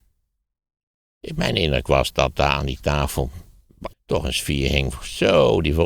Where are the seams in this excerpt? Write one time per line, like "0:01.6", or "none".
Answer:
0:02.1
0:03.9